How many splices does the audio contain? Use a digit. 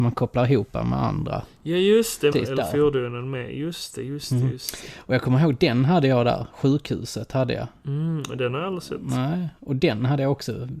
1